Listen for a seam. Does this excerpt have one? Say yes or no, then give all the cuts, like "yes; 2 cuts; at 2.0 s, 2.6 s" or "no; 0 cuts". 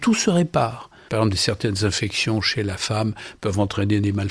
yes; 1 cut; at 1.1 s